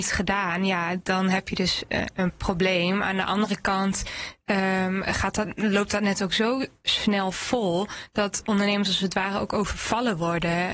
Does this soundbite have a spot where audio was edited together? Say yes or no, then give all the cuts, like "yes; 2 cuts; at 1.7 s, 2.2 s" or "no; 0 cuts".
no; 0 cuts